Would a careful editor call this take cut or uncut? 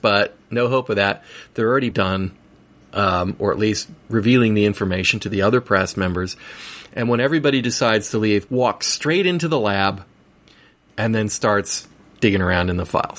cut